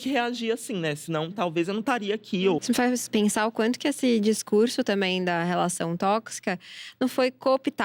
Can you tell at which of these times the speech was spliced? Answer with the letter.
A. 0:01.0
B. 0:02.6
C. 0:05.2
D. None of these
B